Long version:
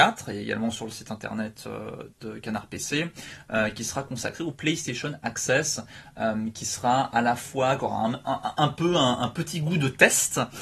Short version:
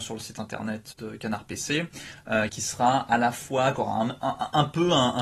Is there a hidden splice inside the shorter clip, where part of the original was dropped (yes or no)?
yes